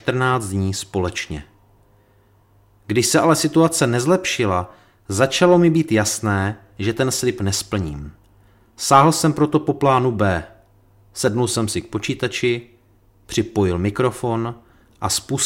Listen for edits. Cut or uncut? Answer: uncut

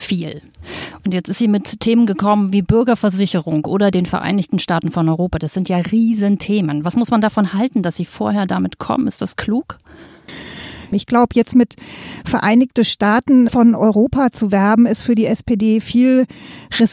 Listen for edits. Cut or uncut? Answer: cut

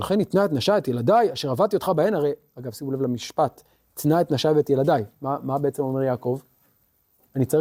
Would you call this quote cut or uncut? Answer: uncut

